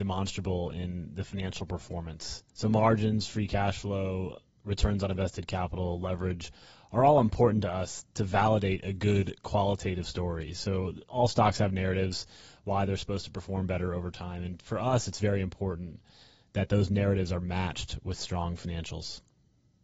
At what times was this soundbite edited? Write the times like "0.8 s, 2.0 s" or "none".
2.5 s